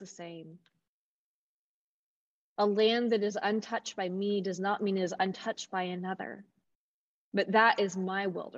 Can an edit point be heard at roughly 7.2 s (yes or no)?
yes